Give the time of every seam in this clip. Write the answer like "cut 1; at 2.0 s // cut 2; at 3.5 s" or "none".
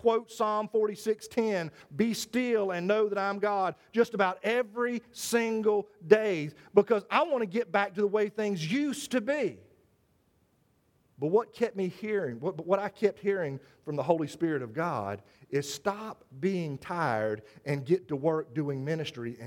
none